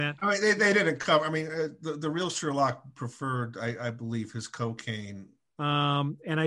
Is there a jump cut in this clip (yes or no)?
yes